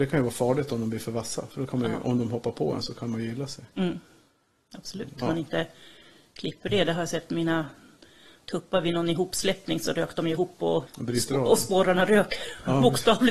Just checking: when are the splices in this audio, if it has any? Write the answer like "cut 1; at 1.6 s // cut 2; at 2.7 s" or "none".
cut 1; at 5.2 s // cut 2; at 10.9 s